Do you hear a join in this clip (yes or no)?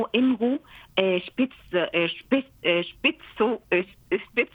no